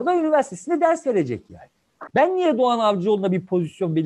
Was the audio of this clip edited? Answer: yes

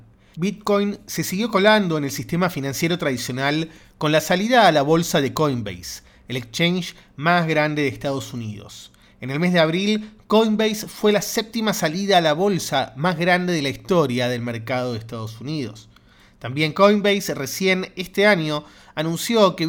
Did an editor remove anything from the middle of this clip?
no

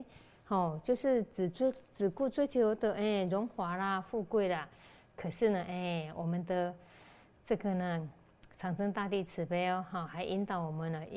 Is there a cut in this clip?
no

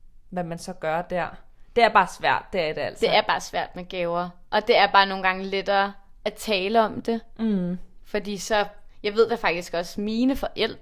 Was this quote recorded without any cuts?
yes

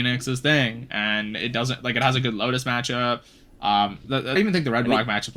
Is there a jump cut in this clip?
yes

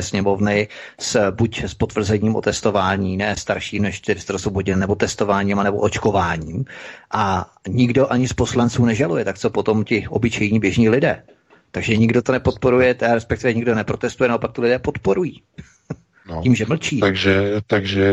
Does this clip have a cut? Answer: no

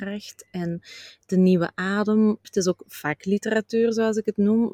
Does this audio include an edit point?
yes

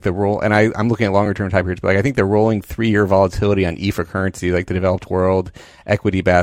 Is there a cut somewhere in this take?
no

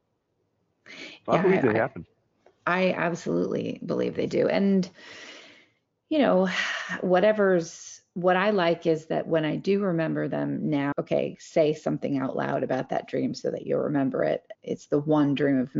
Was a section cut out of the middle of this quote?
yes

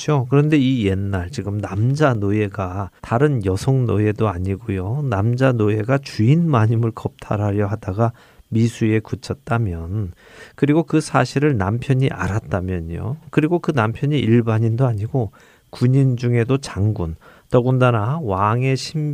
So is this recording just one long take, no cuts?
no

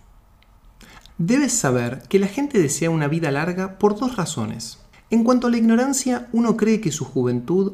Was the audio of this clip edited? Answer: yes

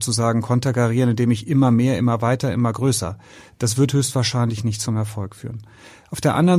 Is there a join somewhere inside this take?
no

